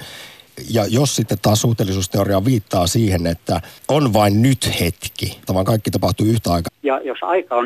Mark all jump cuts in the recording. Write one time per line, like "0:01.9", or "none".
0:05.5
0:06.7